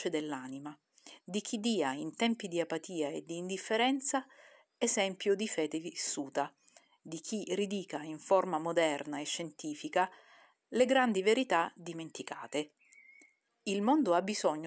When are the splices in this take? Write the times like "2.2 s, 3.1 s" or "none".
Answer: 13.5 s